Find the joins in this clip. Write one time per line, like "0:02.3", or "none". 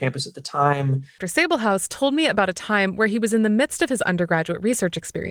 0:01.2

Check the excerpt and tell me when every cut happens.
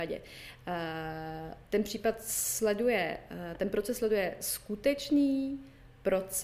none

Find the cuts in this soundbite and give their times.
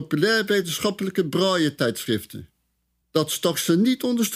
0:03.0

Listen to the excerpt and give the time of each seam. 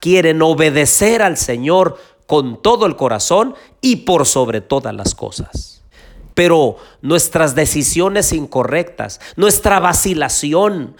0:06.3

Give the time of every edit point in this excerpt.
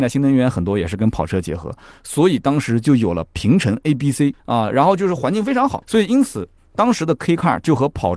0:04.4
0:05.8

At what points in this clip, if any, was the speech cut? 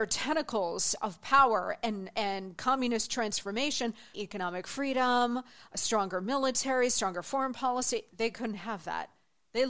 0:04.1

